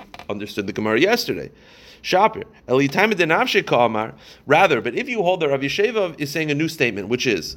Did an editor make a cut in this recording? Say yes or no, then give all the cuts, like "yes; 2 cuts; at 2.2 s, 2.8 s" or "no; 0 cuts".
no; 0 cuts